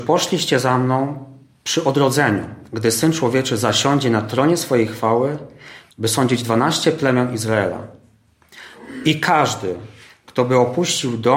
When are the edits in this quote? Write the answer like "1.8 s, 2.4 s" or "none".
5.9 s

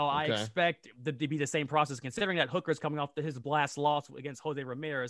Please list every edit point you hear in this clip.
none

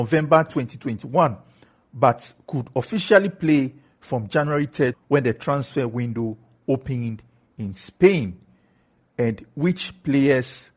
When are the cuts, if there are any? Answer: 4.9 s

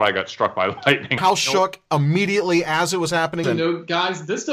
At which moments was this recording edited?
1.2 s, 3.4 s

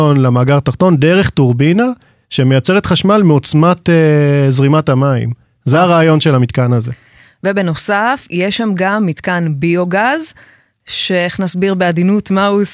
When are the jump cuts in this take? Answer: none

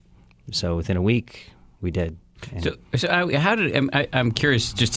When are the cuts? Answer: none

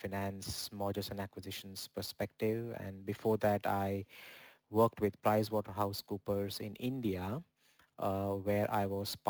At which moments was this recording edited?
none

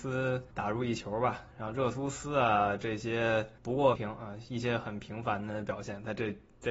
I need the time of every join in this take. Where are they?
3.9 s

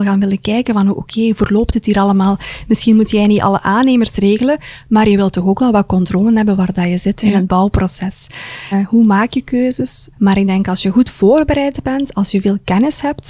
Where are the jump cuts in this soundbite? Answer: 8.7 s, 10.1 s

